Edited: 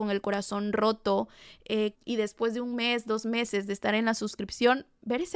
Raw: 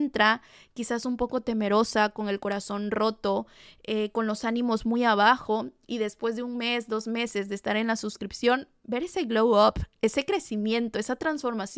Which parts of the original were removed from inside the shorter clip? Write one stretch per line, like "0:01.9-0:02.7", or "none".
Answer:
0:04.1-0:05.8